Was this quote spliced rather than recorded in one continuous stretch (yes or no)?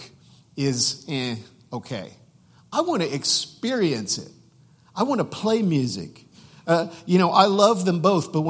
no